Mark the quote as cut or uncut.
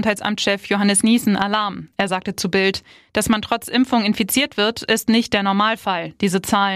uncut